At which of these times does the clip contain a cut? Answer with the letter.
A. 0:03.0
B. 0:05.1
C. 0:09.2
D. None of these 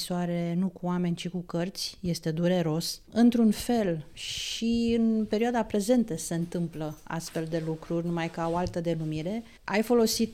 D